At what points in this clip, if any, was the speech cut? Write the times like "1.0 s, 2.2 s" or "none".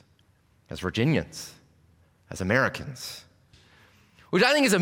3.5 s